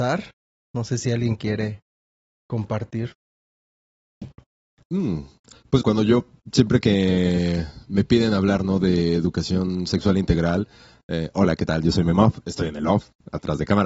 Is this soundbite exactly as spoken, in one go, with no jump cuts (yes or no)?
no